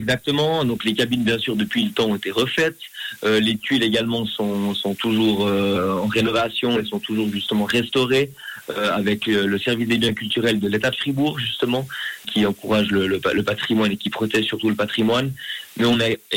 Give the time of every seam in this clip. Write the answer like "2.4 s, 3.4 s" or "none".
12.2 s